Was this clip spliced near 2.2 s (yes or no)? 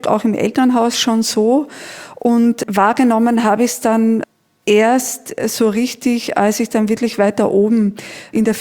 no